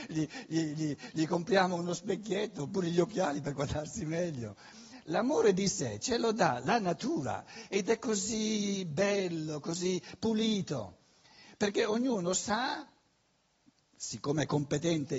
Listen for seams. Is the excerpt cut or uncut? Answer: uncut